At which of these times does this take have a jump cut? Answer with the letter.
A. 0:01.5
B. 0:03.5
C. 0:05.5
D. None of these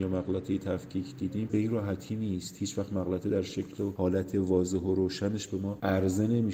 A